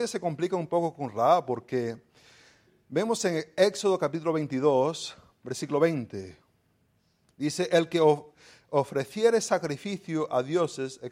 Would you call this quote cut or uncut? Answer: uncut